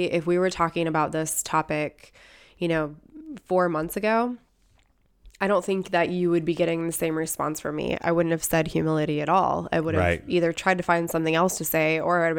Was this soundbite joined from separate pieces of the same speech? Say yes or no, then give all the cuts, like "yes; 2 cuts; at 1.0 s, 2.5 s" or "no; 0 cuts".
no; 0 cuts